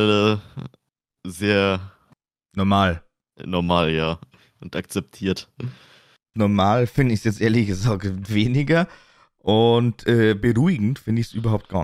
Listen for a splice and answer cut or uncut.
cut